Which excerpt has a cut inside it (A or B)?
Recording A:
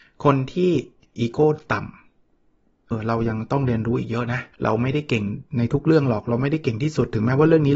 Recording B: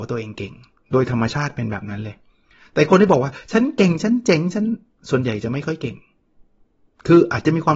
A